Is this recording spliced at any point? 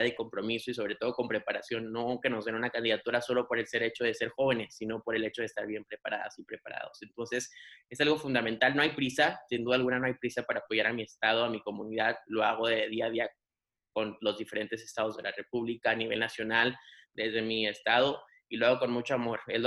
no; 0 cuts

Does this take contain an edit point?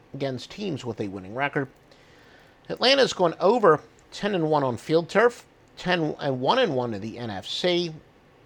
no; 0 cuts

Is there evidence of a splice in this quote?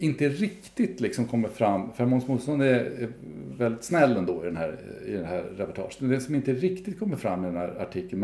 no; 0 cuts

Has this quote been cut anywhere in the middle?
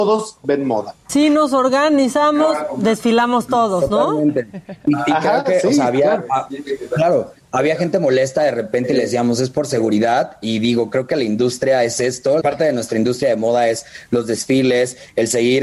yes; 1 cut; at 12.4 s

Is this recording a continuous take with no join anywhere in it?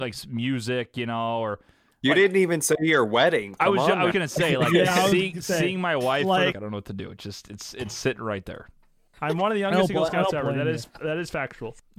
no; 2 cuts; at 4.1 s, 6.5 s

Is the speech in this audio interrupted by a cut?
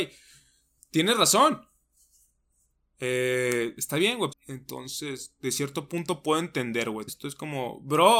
yes; 2 cuts; at 4.3 s, 7.1 s

